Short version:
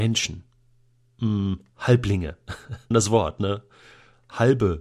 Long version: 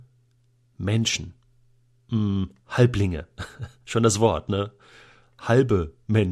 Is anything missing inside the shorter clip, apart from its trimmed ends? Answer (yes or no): yes